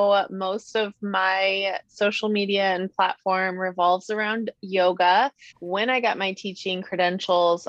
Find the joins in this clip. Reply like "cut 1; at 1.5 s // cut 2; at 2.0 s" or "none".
cut 1; at 5.5 s